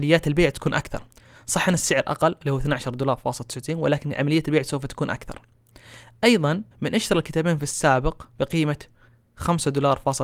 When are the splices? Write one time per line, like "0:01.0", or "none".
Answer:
0:06.7
0:08.3

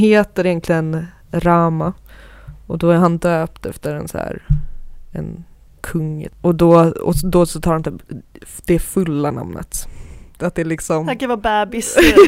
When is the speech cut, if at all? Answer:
0:05.8
0:10.4

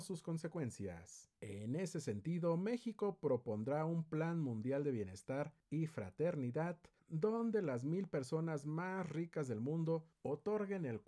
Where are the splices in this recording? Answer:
0:01.4

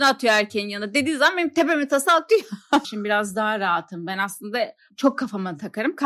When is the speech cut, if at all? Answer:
0:02.8

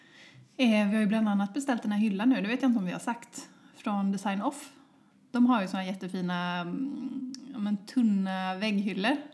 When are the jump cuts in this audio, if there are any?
none

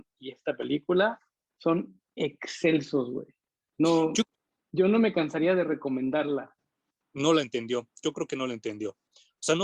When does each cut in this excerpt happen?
0:07.0

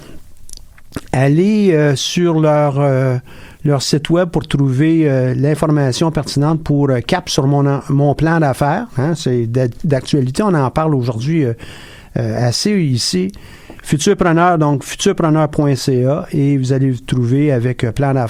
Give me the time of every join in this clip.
none

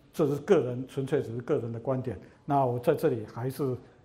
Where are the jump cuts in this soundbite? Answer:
0:02.3

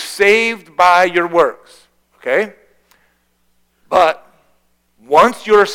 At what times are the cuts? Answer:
0:02.0

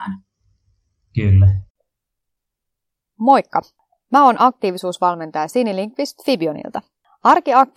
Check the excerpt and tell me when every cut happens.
none

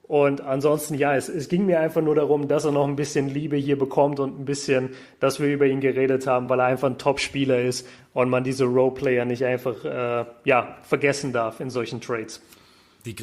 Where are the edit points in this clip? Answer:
none

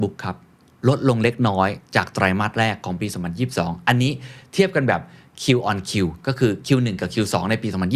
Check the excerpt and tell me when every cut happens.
0:01.9

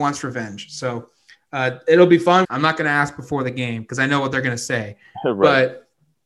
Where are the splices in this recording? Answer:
0:02.4

